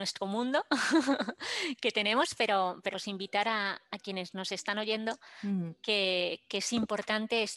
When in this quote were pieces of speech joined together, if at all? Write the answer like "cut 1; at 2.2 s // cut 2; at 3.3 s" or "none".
cut 1; at 2.9 s